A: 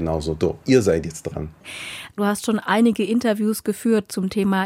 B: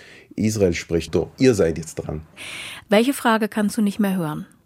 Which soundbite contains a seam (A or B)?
B